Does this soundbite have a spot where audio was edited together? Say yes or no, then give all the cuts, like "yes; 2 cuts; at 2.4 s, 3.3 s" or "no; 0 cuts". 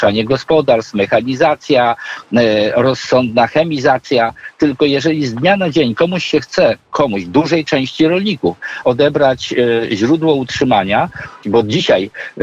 yes; 2 cuts; at 8.8 s, 11.4 s